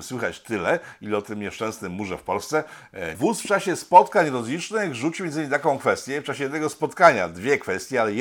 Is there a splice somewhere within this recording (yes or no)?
yes